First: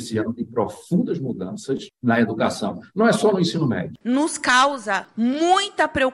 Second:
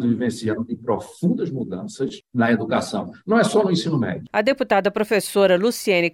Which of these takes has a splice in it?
first; 1 cut; at 4.0 s

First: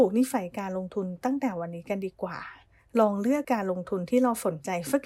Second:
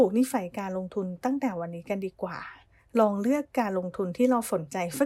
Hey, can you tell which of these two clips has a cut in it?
first; 1 cut; at 3.4 s

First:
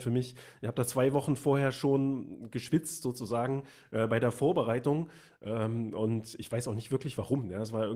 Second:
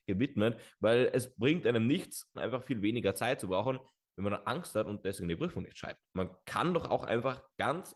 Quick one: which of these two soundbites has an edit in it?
second; 2 cuts; at 2.3 s, 6.1 s

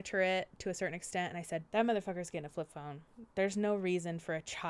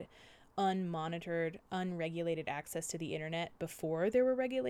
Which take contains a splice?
first; 1 cut; at 1.7 s

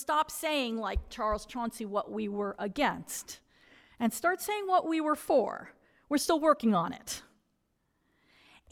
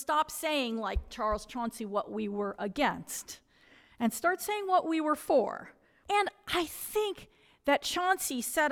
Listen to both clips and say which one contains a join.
second; 1 cut; at 6.0 s

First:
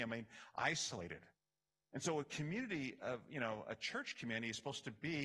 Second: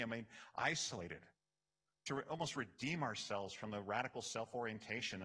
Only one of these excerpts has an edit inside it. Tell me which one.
second; 1 cut; at 1.9 s

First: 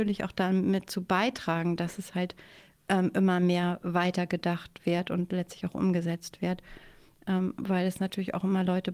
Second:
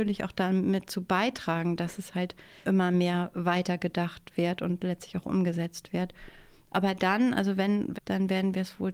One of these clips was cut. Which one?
second; 3 cuts; at 2.6 s, 6.7 s, 7.9 s

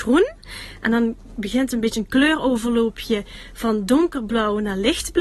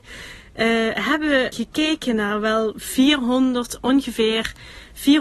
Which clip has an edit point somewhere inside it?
second; 1 cut; at 1.5 s

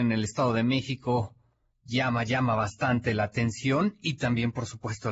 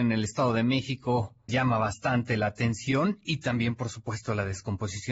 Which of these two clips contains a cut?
second; 1 cut; at 1.5 s

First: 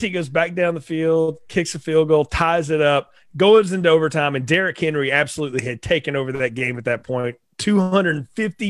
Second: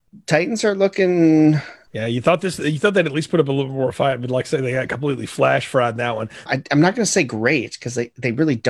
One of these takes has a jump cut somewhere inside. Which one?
second; 2 cuts; at 1.9 s, 6.5 s

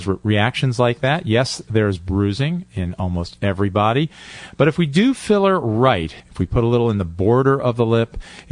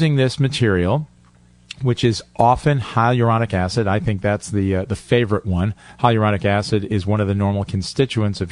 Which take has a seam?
first; 1 cut; at 6.2 s

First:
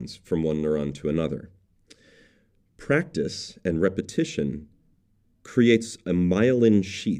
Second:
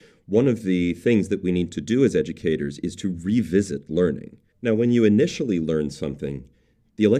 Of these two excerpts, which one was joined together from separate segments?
second; 1 cut; at 4.5 s

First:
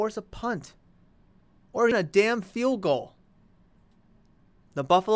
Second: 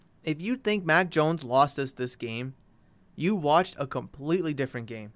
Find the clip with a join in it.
first; 1 cut; at 1.9 s

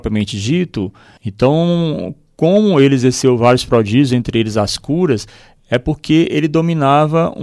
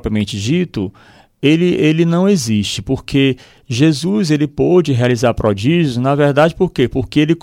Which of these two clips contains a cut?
first; 1 cut; at 1.2 s

